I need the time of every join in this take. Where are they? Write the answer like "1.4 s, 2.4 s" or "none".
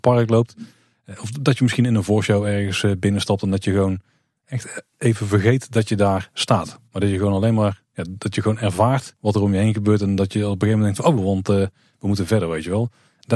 9.2 s, 11.2 s

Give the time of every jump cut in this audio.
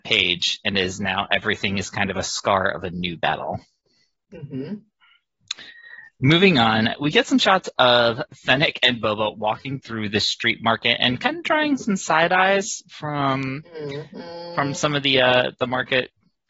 none

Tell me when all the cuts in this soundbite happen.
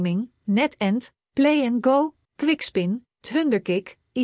2.3 s

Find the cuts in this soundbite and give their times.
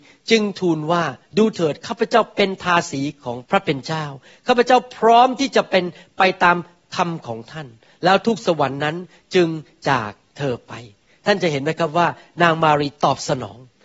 3.5 s

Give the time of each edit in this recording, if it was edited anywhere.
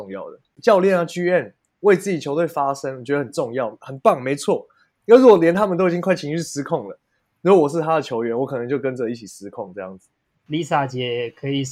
none

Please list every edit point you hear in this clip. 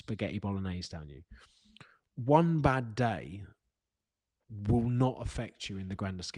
none

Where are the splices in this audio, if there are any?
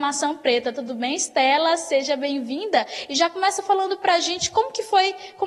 none

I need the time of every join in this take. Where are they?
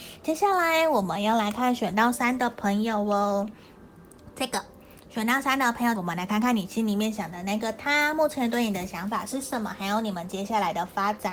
6.0 s

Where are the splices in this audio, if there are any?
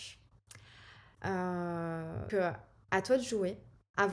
1.1 s, 2.3 s

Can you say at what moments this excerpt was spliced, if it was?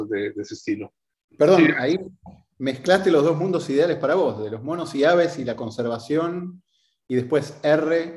1.3 s

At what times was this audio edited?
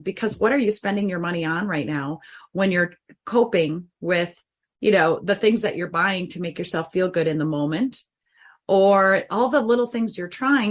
none

